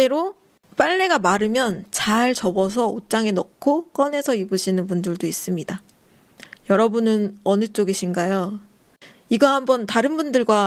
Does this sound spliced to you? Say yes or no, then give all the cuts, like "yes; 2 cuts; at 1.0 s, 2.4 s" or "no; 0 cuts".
no; 0 cuts